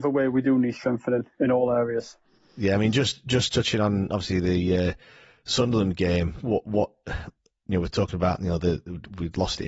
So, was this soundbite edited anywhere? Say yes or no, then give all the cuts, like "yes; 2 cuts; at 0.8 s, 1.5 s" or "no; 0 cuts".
no; 0 cuts